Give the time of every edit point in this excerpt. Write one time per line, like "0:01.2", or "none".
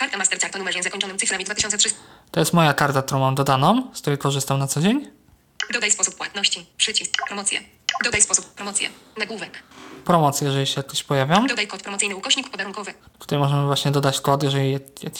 0:08.6